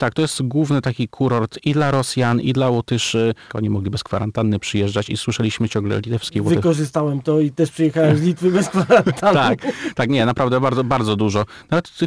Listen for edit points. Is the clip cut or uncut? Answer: cut